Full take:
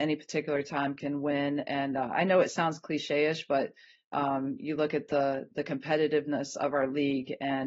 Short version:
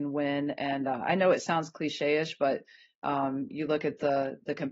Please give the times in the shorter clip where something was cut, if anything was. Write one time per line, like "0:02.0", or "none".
none